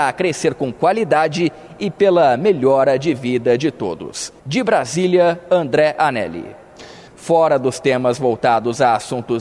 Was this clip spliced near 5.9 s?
no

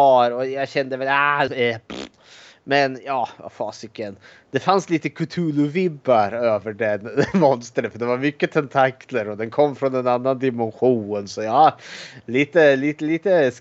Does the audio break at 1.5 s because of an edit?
yes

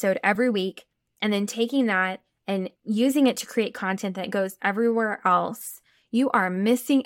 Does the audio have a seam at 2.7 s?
yes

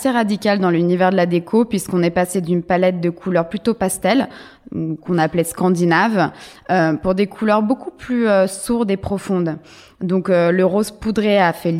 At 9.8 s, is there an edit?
no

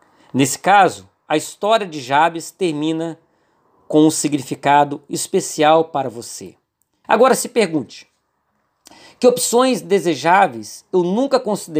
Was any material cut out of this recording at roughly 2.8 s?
no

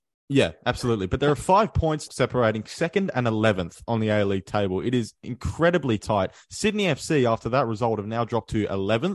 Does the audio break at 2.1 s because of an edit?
yes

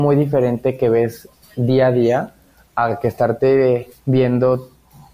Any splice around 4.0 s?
yes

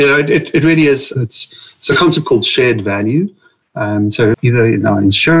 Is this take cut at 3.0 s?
no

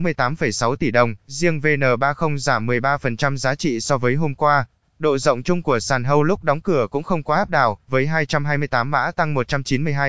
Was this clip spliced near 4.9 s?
yes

